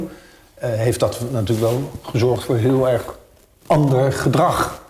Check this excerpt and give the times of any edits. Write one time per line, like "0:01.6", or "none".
none

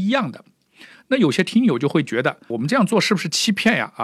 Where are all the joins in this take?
0:02.5

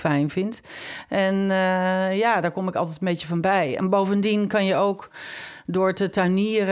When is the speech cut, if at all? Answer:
none

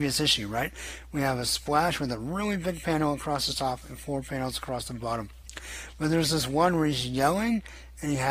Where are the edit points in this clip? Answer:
none

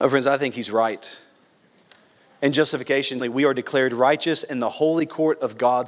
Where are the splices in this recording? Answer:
0:03.2

